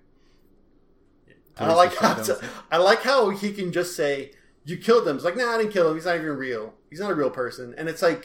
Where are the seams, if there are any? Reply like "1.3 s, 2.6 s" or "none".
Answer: 1.5 s